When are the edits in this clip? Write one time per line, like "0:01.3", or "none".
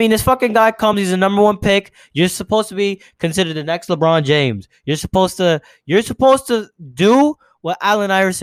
none